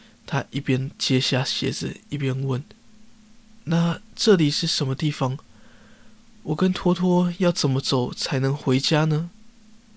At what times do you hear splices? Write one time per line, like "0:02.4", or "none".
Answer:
none